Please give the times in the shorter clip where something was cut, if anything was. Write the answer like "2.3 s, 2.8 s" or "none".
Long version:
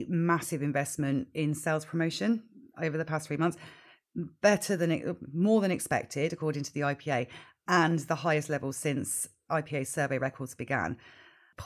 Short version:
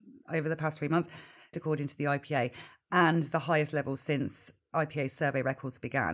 1.5 s